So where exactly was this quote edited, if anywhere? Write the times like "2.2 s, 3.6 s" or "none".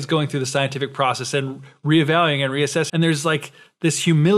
2.9 s